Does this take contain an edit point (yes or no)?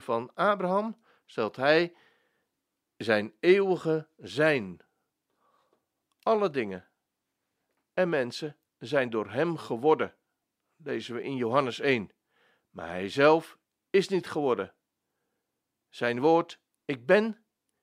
no